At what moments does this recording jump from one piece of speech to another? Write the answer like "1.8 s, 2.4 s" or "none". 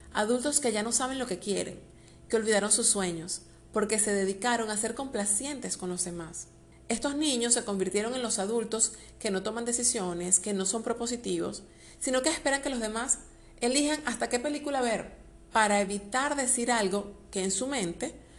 6.7 s